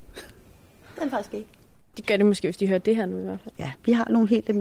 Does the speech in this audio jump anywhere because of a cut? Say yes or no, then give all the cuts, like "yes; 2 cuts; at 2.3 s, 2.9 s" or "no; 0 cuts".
yes; 2 cuts; at 1.9 s, 3.6 s